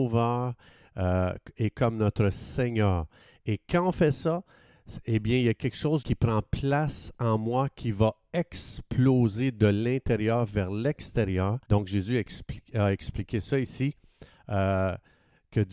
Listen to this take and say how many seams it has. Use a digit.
2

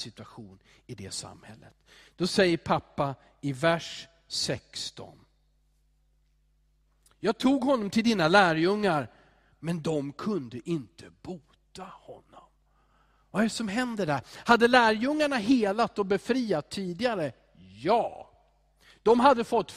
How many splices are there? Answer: 0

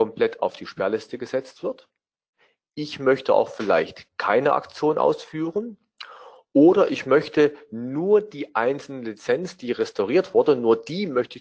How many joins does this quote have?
0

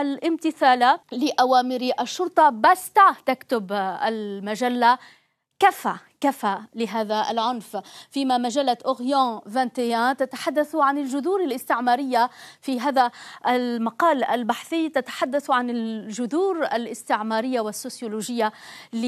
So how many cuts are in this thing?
1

